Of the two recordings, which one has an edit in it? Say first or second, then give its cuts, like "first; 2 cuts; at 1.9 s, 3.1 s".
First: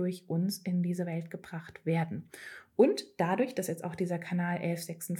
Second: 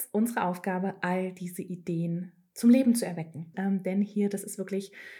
second; 1 cut; at 3.5 s